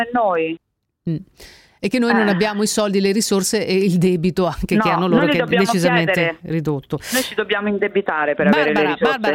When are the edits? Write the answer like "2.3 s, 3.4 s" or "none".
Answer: none